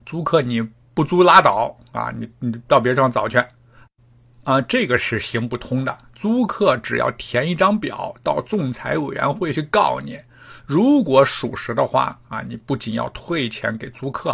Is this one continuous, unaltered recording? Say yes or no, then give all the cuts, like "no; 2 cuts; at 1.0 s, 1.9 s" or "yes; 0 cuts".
yes; 0 cuts